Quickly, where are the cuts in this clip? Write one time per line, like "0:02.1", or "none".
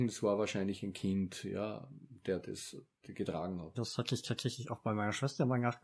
0:03.7